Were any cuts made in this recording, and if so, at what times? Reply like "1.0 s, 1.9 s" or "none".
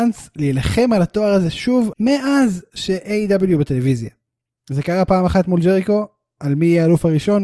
1.9 s